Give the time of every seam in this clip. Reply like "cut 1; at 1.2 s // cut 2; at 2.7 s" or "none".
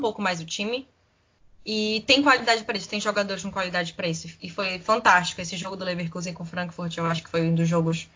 none